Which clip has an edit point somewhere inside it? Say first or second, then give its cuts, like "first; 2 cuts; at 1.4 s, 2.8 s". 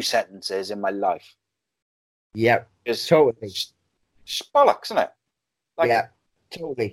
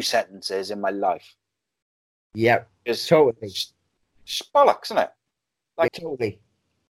second; 1 cut; at 5.9 s